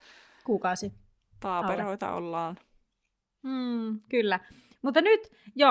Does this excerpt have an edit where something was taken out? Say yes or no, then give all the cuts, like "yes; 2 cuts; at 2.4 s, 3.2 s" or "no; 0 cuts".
no; 0 cuts